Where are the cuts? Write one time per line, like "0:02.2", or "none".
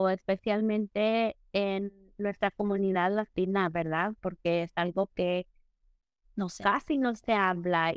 none